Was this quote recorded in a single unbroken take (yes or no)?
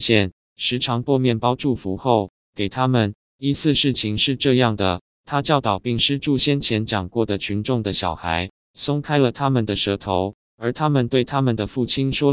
yes